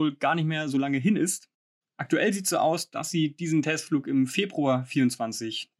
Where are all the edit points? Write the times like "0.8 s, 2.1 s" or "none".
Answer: none